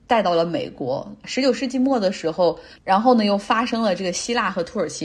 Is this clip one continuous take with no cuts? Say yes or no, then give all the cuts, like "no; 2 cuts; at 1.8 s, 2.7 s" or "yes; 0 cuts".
no; 2 cuts; at 1.2 s, 2.8 s